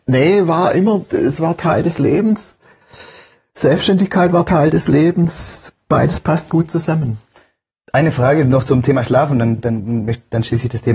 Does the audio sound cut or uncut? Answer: uncut